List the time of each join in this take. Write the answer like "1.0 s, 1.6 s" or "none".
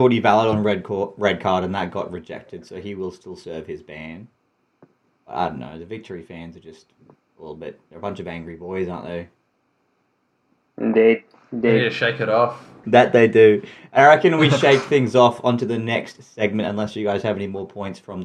12.8 s